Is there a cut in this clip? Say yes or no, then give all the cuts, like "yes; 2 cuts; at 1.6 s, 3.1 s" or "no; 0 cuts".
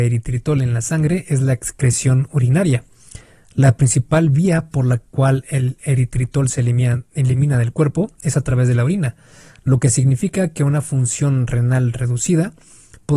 no; 0 cuts